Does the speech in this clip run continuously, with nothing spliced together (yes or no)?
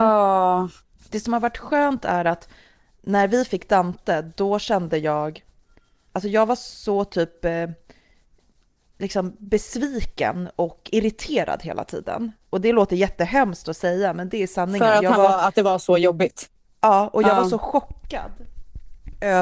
yes